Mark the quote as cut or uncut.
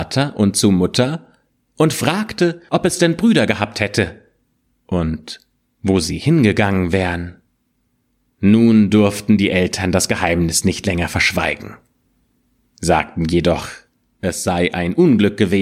uncut